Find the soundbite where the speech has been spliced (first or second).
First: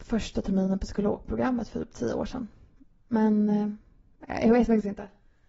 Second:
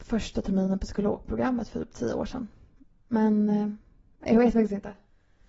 second